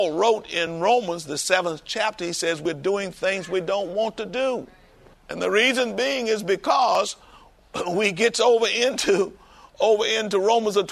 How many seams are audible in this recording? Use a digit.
1